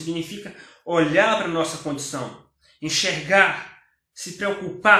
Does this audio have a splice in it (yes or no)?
no